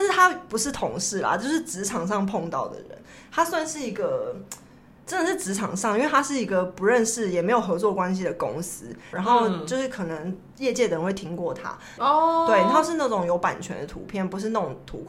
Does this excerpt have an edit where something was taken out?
yes; 2 cuts; at 9.1 s, 12.0 s

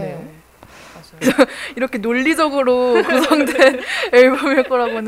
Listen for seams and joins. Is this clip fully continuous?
no; 1 cut; at 1.2 s

